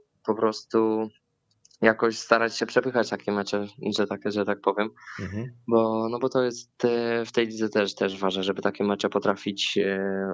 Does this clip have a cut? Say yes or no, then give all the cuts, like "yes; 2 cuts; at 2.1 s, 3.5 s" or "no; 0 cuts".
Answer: no; 0 cuts